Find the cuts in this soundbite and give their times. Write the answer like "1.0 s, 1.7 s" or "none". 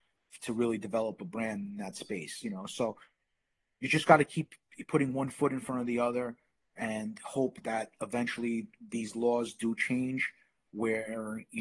none

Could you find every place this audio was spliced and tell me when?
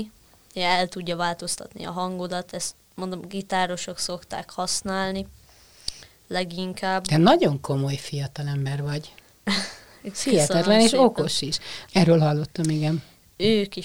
11.9 s

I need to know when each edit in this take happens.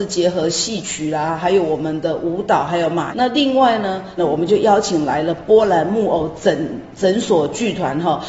3.1 s, 4.2 s

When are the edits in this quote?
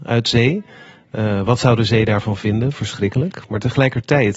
none

